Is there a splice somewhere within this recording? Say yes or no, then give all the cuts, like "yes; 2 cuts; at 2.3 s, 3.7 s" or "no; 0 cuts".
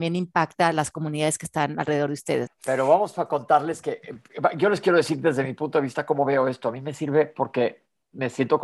yes; 1 cut; at 2.5 s